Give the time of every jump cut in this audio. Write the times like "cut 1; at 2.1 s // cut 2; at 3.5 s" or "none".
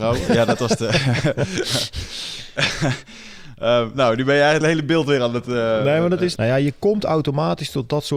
cut 1; at 4.6 s // cut 2; at 6.4 s